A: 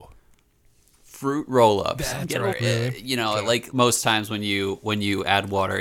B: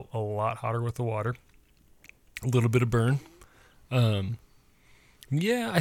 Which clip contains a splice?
A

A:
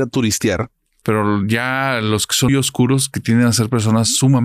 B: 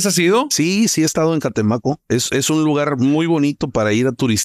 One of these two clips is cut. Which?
A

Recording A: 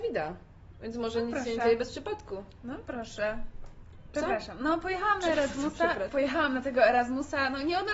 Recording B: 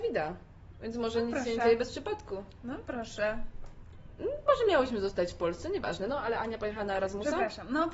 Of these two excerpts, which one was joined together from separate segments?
A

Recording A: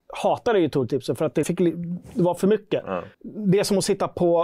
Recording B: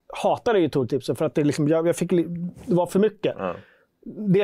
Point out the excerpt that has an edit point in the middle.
A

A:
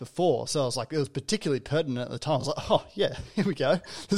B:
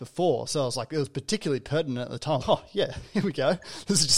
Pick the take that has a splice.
B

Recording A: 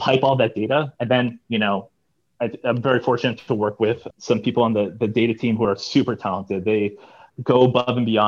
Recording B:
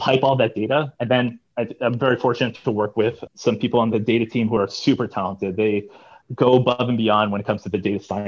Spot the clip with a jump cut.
B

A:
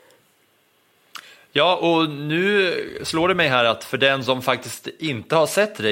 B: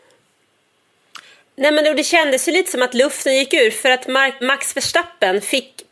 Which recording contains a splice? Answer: B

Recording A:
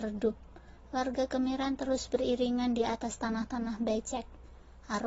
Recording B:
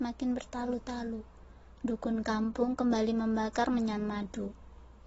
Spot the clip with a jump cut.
B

